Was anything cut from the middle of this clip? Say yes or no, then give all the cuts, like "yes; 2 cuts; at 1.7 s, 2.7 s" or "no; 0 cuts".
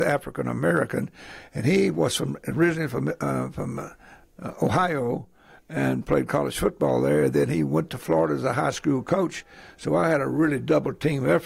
no; 0 cuts